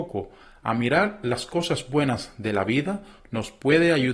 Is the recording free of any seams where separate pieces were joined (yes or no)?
yes